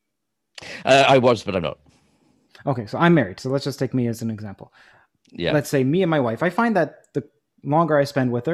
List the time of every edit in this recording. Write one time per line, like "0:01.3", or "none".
none